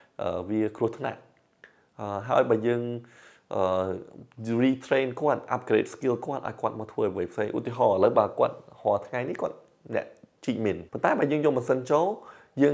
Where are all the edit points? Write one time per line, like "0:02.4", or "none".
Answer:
0:10.9